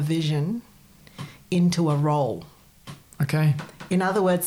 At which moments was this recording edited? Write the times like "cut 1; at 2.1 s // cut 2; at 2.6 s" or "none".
none